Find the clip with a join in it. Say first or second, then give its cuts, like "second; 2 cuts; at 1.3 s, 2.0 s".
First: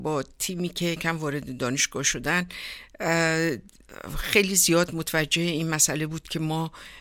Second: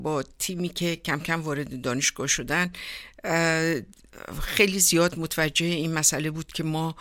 first; 1 cut; at 1.0 s